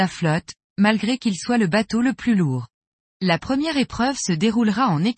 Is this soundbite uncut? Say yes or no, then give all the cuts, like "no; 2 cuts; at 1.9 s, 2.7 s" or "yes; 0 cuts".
no; 1 cut; at 3.1 s